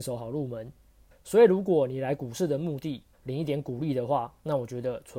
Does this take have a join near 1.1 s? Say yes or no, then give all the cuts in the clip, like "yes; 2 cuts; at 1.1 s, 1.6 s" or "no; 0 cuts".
yes; 2 cuts; at 1.1 s, 3.1 s